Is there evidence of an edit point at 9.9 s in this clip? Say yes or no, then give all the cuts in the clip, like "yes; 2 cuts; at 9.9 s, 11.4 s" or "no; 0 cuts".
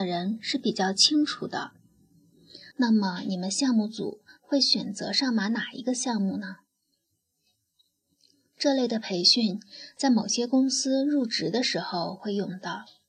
no; 1 cut; at 2.7 s